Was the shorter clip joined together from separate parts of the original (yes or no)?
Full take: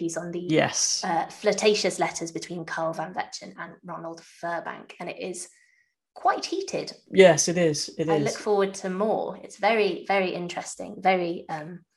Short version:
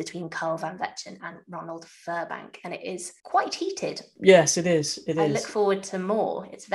yes